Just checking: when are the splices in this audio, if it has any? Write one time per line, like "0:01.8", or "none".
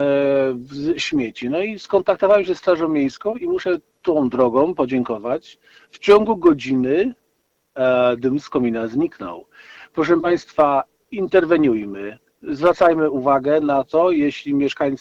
none